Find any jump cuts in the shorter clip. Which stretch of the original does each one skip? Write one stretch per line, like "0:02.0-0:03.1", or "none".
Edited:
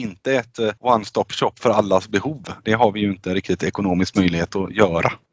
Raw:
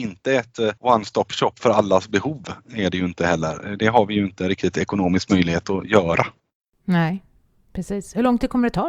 0:02.6-0:03.8